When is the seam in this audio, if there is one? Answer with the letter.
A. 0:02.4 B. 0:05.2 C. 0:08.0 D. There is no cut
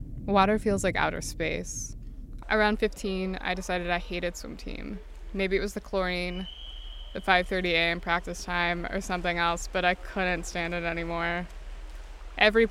A